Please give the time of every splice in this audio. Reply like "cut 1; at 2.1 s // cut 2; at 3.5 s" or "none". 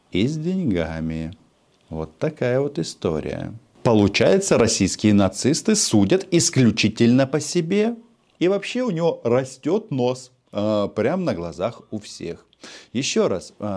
cut 1; at 8.4 s